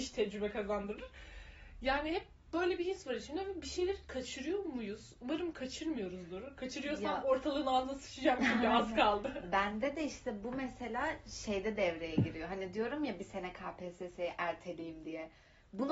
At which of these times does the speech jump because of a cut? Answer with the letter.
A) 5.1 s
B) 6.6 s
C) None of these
C